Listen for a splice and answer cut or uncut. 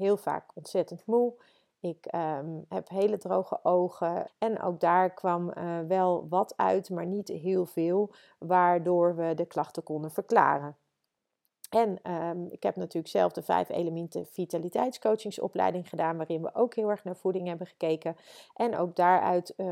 cut